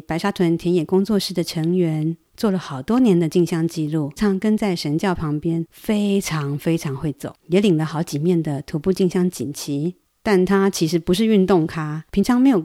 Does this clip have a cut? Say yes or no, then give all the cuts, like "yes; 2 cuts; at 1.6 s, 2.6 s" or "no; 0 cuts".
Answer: yes; 1 cut; at 4.2 s